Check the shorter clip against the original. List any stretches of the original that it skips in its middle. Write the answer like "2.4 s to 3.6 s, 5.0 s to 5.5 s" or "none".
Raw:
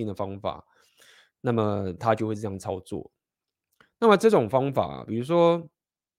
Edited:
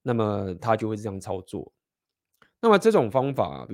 none